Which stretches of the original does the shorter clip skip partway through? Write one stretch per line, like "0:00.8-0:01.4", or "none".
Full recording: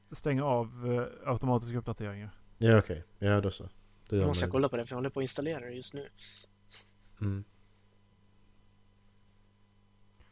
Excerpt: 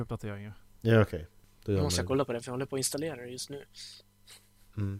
0:03.2-0:03.9